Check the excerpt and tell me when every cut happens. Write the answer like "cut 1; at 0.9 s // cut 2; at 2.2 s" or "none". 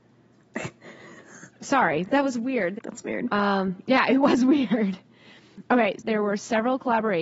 cut 1; at 2.8 s // cut 2; at 6.0 s